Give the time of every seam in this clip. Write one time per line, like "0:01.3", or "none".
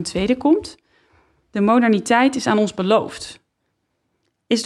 none